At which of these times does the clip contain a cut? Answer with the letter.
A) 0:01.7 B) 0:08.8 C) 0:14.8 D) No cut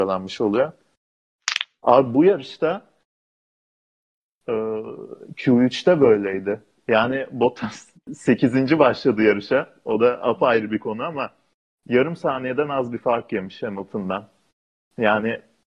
D